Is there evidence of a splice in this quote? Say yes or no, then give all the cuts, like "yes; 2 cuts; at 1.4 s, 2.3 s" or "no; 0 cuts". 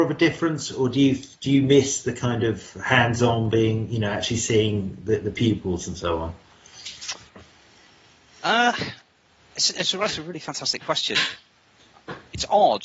no; 0 cuts